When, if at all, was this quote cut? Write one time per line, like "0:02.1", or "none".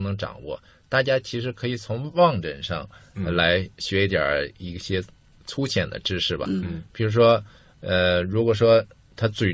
none